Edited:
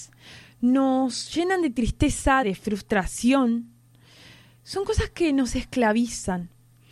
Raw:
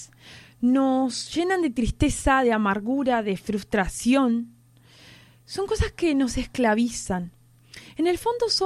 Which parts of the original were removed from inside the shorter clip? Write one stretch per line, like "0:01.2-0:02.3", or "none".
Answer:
0:02.4-0:03.2